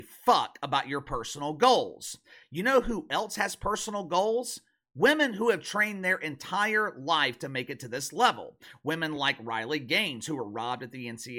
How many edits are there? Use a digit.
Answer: 0